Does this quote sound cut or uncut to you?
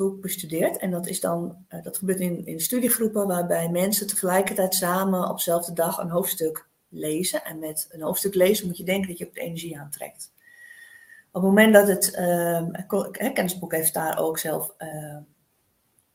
uncut